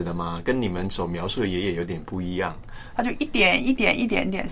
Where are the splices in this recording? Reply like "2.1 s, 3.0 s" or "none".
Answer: 2.9 s